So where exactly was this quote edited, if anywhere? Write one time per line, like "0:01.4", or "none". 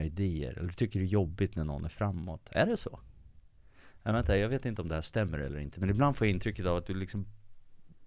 none

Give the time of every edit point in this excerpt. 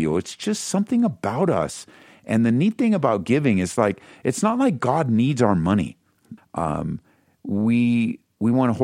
0:06.4

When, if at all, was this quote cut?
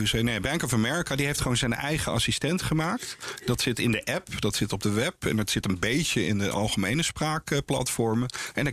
none

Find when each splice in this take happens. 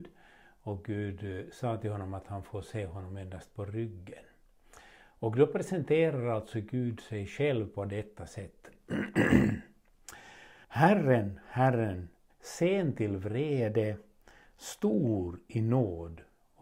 0:10.6
0:12.3

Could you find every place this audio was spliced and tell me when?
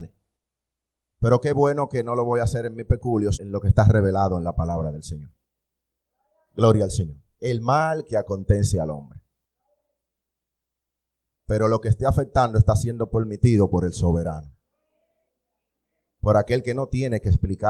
0:03.3
0:11.4

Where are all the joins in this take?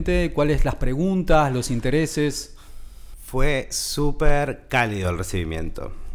none

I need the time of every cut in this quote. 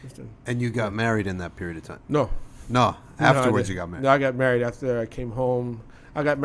none

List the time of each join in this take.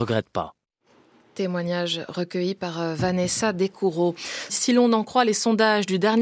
0:04.5

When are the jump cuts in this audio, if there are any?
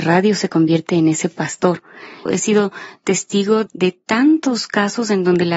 0:02.3
0:03.7

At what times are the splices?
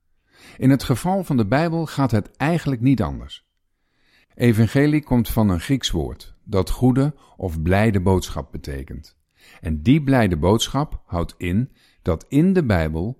0:04.2

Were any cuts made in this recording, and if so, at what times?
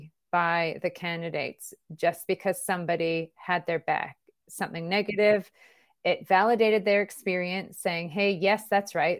none

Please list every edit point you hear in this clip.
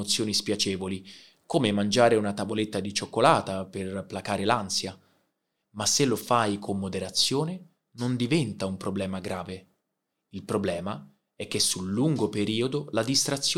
none

